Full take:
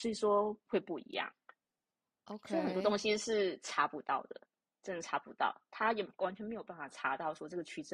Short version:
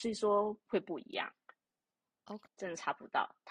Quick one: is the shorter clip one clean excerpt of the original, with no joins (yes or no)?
no